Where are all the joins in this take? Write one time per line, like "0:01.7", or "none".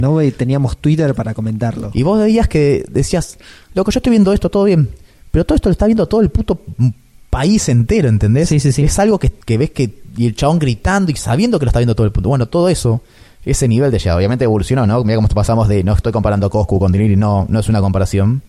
0:09.4